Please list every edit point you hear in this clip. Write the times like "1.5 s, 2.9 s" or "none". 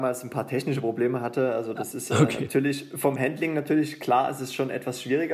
none